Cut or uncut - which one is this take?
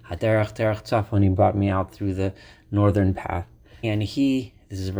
cut